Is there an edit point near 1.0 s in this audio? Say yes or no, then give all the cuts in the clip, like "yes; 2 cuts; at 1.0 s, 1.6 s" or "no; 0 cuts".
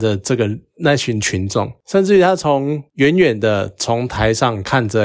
no; 0 cuts